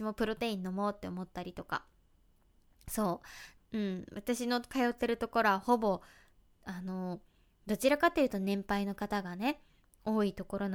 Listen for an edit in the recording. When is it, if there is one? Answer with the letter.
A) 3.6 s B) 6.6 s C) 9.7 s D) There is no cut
A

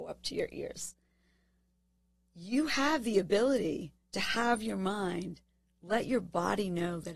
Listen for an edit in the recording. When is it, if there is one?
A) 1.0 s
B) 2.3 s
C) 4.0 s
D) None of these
C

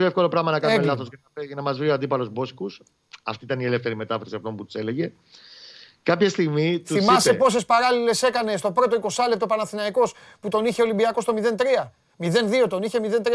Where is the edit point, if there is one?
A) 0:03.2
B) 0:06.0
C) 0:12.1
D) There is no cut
D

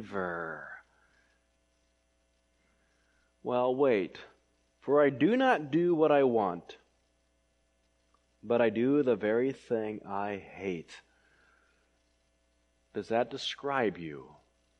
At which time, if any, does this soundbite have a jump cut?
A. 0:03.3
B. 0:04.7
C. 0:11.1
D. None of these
B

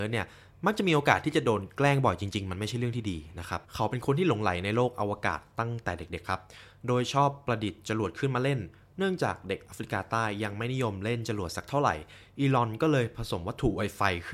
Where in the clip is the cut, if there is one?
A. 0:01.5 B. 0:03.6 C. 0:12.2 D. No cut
B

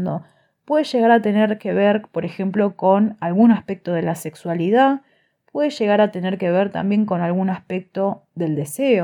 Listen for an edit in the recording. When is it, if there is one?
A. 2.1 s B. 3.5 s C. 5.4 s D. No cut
D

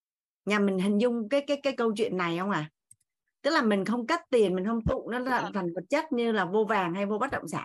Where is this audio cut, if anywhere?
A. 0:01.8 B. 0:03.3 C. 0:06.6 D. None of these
A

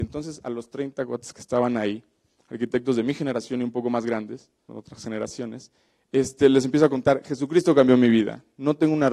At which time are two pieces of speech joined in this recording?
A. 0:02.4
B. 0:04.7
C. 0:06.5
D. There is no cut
B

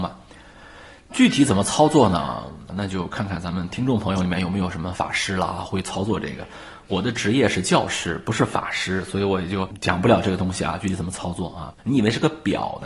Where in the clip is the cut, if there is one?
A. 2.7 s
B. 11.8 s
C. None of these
B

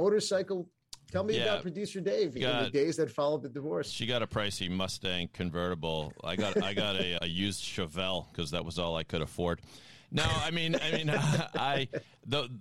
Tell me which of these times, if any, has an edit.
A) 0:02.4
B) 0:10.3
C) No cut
A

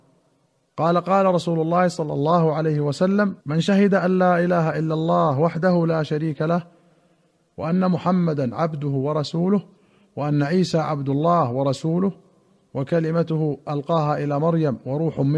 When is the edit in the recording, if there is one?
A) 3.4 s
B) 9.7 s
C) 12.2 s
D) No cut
A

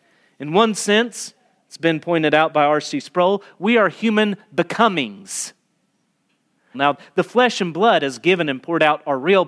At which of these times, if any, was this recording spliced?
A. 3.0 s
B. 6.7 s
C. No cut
B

